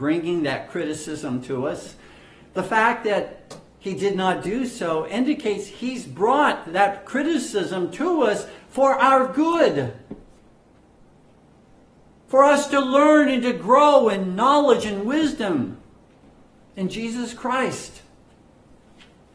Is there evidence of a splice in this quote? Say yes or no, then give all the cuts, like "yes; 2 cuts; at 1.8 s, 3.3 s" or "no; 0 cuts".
no; 0 cuts